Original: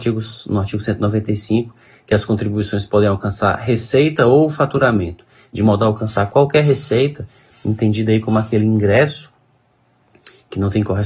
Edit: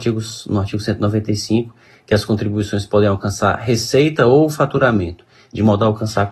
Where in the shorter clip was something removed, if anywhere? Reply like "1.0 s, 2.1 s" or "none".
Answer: none